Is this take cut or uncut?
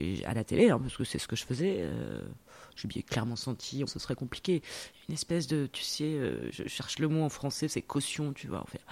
cut